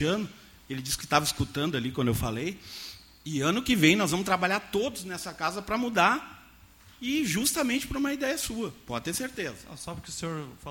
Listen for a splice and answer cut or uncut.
uncut